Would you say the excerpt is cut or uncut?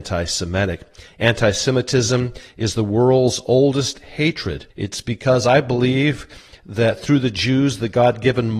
cut